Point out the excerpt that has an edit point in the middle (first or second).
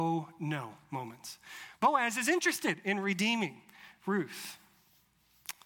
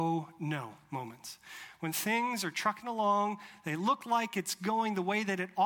first